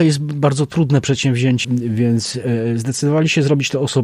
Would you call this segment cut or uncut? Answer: cut